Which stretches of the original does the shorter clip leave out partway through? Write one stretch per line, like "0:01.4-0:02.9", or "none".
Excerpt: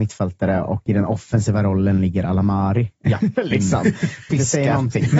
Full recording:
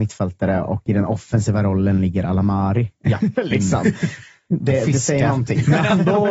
0:04.3-0:04.9